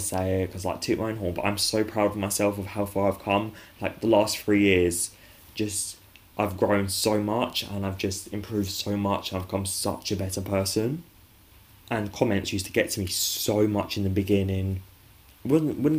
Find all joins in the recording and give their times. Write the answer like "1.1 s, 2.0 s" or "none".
none